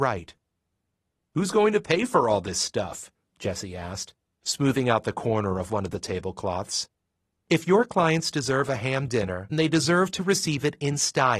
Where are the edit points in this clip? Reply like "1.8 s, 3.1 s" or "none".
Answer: 7.3 s, 9.5 s